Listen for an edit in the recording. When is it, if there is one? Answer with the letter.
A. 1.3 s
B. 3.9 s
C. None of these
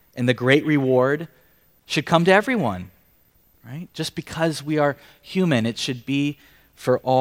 B